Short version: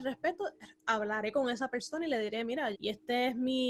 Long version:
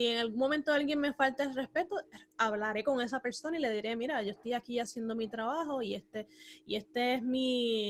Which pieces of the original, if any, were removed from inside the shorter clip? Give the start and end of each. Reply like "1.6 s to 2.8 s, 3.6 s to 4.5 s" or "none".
4.2 s to 6.6 s

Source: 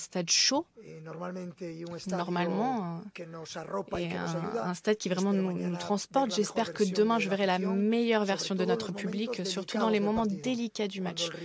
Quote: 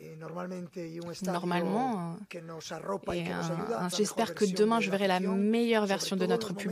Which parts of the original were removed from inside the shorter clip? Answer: 4.8 s to 6.3 s

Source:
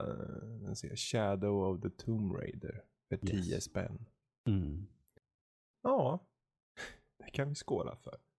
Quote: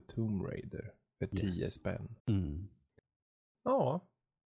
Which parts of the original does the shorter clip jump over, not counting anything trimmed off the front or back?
4.1 s to 4.4 s

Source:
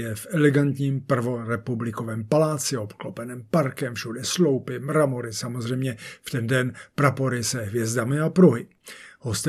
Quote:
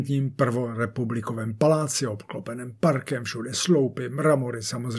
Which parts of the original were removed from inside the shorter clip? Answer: none

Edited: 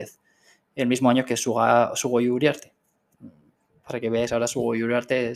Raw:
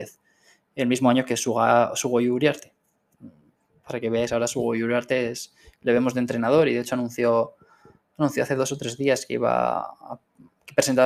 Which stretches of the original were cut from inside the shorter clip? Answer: none

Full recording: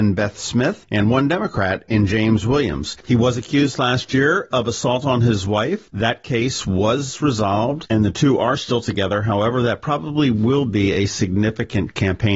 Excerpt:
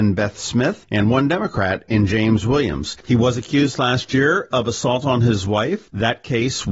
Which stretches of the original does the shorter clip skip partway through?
none

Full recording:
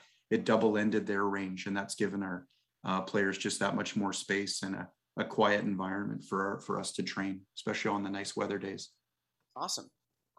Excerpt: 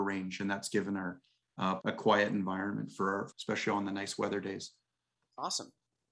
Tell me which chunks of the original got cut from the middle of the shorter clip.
3.0 s to 5.1 s, 6.6 s to 7.5 s

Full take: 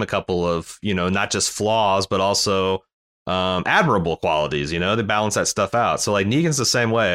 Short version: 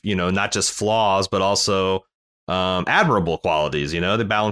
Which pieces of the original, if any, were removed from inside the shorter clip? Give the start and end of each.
none

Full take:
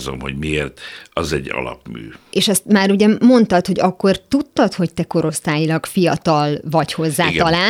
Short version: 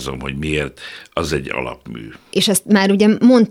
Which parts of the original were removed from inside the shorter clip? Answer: none

